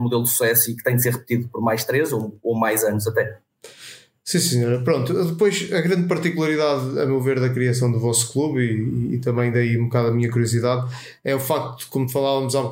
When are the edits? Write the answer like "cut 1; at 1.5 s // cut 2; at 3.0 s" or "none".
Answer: none